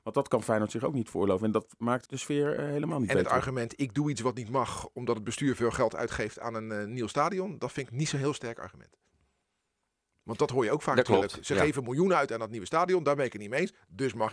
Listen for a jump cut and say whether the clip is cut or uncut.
cut